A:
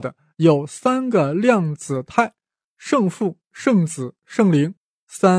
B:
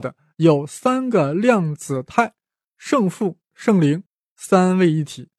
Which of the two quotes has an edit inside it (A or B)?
B